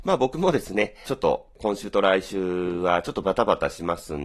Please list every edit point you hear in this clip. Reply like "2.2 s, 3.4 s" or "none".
1.1 s